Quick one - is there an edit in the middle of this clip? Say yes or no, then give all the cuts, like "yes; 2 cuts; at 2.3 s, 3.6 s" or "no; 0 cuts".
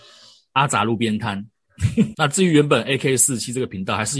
yes; 1 cut; at 2.1 s